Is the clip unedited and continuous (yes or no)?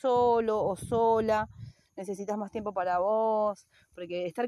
yes